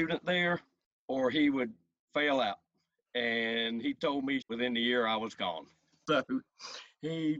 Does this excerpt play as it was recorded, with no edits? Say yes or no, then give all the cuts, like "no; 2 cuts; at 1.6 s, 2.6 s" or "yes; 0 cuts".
no; 1 cut; at 4.4 s